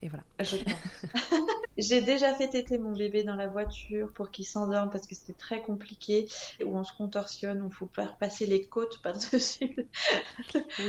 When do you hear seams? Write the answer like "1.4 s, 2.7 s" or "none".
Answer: 1.6 s, 6.6 s

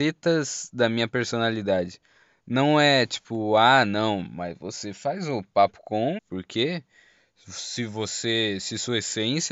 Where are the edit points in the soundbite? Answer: 6.2 s

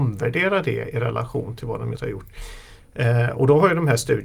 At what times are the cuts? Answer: 1.9 s

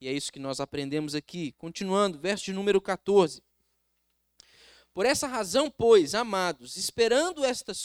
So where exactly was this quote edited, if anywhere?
none

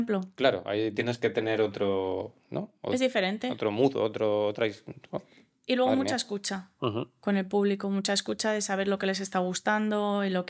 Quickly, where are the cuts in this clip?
none

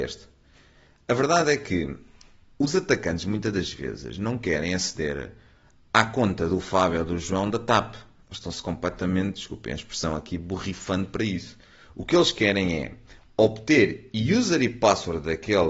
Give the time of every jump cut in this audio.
none

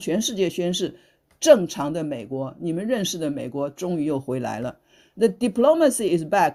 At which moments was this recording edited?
none

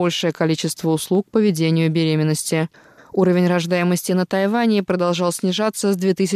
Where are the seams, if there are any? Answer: 3.0 s

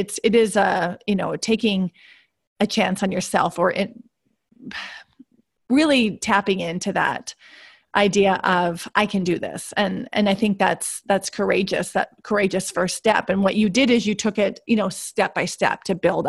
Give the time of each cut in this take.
none

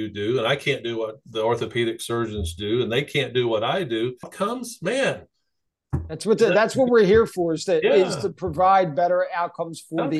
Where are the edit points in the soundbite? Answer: 4.2 s

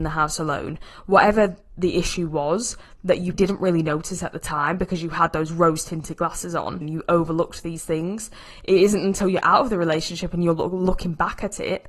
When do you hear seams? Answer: 3.3 s, 6.8 s

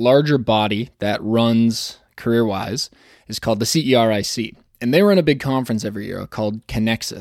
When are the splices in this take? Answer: none

